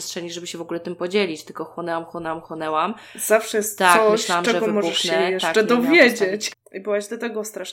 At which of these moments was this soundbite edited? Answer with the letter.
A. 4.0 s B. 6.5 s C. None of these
B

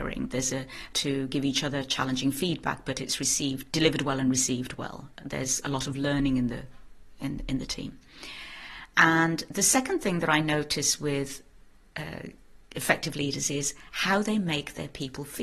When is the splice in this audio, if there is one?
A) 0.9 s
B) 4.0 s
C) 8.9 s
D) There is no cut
A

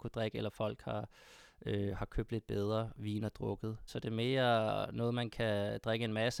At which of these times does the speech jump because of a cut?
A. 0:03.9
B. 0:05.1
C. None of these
A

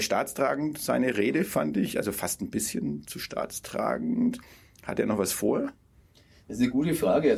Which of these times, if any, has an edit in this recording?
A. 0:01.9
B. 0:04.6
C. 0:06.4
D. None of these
D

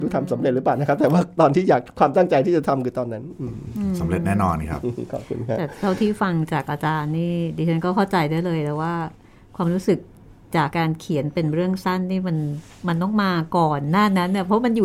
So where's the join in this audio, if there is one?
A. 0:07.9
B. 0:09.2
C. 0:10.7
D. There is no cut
C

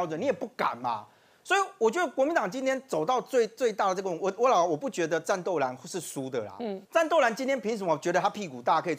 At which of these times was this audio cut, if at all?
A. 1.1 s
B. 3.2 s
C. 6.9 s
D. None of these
C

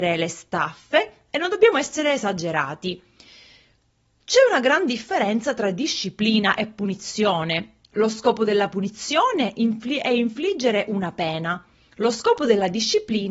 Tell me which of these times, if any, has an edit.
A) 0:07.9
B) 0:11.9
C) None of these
C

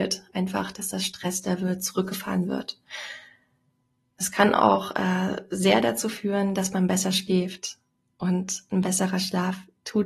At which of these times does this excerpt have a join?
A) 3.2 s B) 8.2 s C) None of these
C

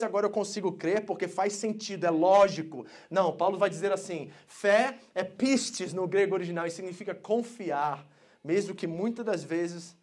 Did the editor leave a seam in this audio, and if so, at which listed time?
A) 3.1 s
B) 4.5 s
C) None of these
C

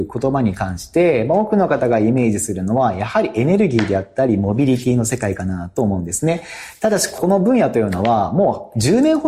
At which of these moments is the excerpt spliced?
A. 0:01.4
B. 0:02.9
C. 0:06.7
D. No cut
D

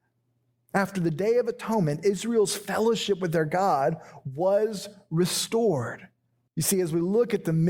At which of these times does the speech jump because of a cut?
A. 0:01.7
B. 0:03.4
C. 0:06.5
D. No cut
C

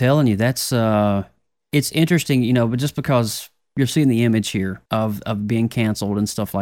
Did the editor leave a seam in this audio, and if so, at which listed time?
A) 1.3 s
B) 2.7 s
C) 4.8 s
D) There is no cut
C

